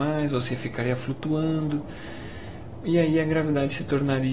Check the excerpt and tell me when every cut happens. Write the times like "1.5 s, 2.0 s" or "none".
none